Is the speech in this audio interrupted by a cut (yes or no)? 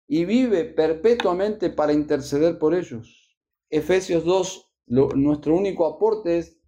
yes